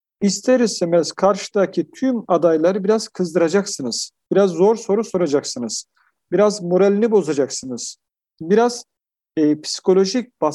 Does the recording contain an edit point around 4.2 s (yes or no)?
no